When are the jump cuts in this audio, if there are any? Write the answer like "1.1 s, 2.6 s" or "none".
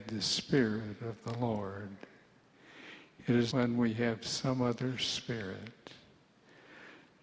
3.5 s

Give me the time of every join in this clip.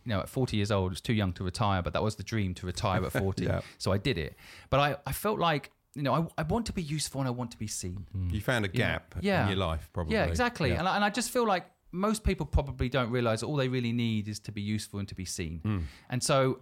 none

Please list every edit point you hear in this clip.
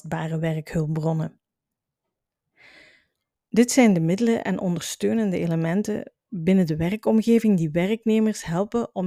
3.4 s

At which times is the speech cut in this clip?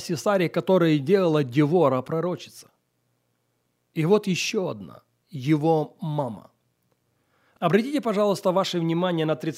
none

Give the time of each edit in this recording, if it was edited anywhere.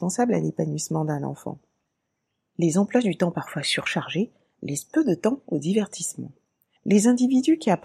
6.8 s

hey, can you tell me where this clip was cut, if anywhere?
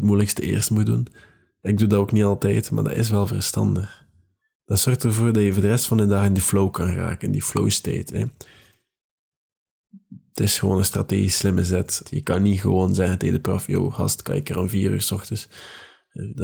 12.0 s

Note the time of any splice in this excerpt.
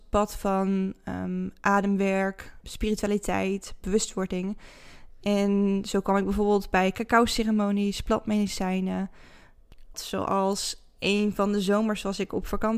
2.6 s, 9.9 s

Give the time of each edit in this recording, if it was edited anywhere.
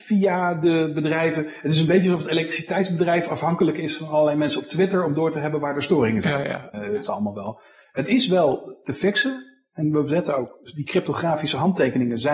6.7 s

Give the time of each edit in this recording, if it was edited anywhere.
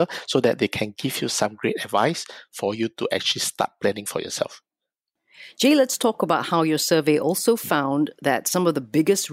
none

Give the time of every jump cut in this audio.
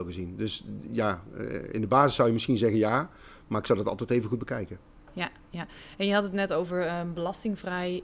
none

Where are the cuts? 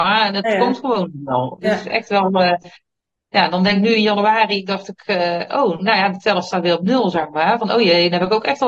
none

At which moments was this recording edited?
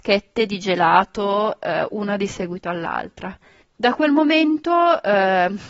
3.6 s

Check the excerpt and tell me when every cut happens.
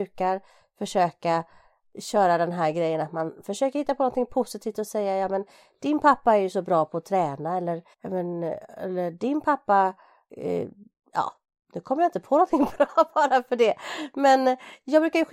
7.9 s

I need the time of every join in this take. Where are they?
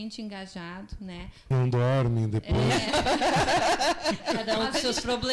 1.5 s

